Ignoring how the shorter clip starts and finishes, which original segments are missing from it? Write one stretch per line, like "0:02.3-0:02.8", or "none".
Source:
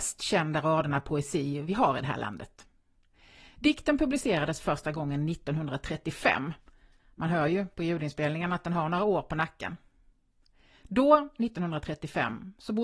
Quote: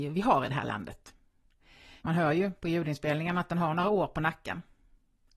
0:03.5-0:07.1